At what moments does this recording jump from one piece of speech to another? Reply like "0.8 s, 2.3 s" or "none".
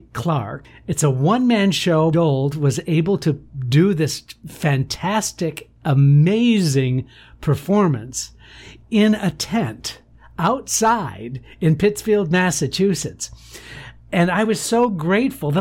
2.1 s